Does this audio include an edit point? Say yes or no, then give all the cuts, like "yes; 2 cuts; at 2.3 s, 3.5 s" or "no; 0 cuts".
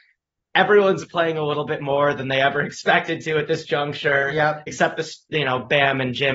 no; 0 cuts